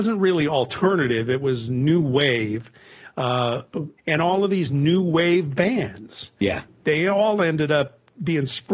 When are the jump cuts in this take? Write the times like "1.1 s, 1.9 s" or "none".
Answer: 4.0 s, 6.8 s